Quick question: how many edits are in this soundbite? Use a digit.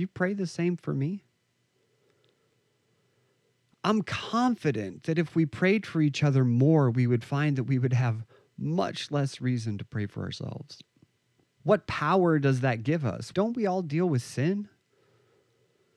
2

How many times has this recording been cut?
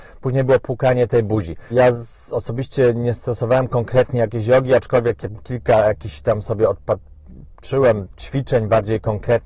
2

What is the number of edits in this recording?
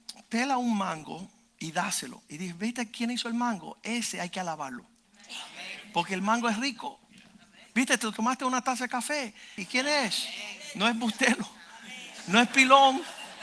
1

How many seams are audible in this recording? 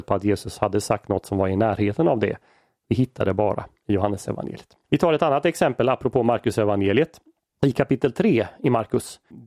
0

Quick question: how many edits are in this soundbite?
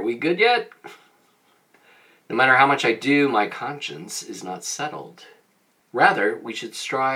1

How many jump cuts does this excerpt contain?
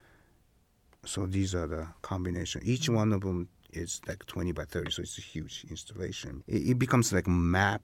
1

